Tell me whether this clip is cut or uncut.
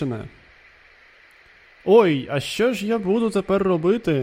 uncut